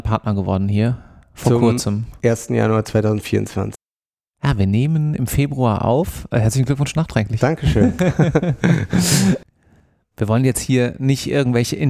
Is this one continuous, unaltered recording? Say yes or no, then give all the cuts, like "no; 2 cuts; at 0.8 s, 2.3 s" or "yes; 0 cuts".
yes; 0 cuts